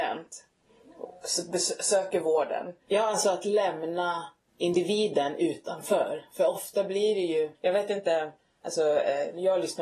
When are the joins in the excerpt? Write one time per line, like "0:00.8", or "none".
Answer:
0:02.9
0:07.5